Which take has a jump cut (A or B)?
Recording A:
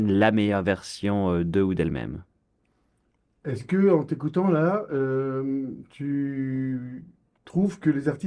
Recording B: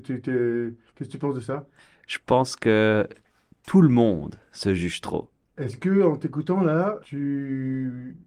B